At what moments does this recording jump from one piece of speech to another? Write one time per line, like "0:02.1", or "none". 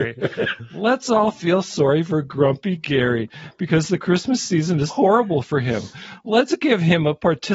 0:04.9